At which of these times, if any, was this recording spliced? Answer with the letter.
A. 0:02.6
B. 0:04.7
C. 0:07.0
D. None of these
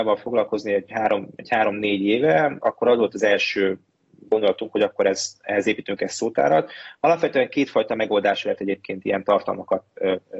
A